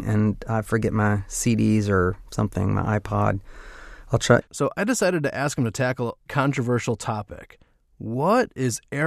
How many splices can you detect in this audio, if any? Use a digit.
2